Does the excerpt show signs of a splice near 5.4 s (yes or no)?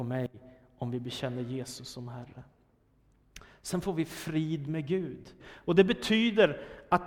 yes